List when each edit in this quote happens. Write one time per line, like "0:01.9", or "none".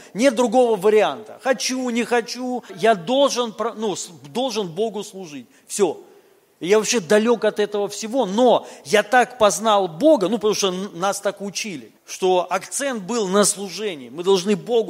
0:02.7
0:06.5
0:12.0